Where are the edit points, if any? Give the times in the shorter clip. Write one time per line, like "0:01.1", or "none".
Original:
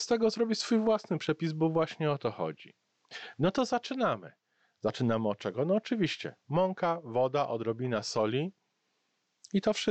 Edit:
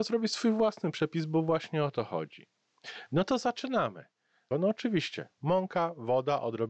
0:04.5